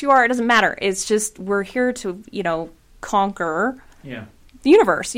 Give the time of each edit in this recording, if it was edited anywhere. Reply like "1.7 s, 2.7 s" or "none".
none